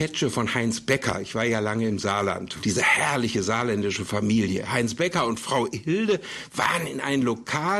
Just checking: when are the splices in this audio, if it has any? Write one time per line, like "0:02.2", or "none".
0:02.6